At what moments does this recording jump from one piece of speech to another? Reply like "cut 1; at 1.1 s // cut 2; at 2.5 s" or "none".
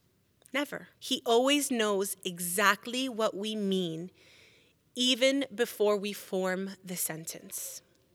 cut 1; at 0.9 s